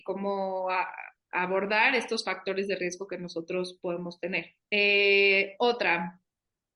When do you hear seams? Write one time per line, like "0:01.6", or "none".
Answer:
0:04.6

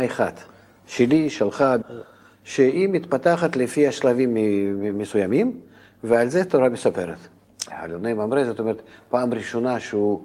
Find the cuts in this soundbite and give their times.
0:01.8
0:07.7

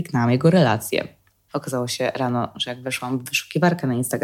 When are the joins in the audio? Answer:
0:01.5

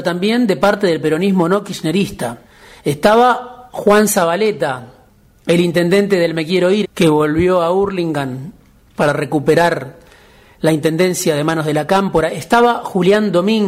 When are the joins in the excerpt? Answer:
0:06.8

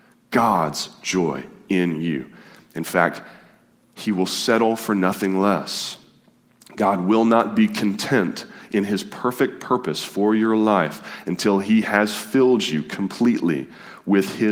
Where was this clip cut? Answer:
none

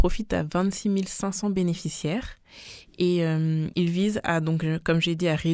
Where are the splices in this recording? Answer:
none

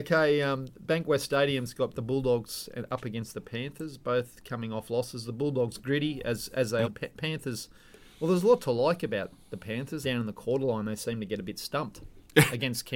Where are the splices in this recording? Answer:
0:06.8
0:10.0

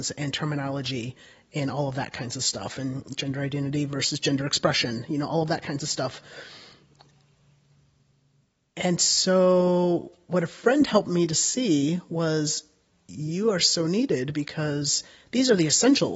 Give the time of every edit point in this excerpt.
none

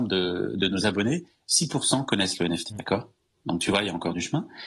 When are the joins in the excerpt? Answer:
0:02.7

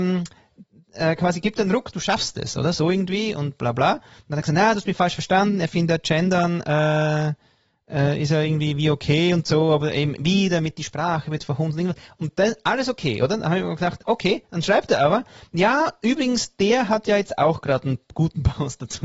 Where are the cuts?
none

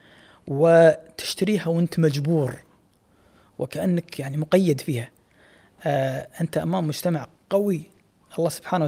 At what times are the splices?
0:07.4

